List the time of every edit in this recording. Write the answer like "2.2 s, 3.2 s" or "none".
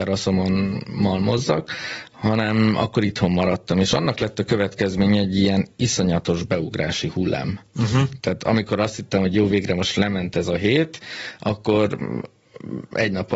8.2 s